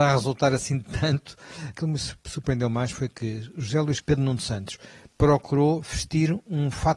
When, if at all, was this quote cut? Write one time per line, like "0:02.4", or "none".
0:01.7
0:04.0